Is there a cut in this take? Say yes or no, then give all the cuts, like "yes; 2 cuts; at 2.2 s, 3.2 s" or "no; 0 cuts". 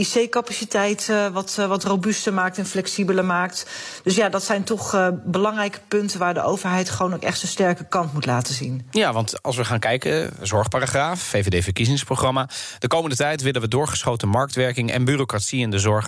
no; 0 cuts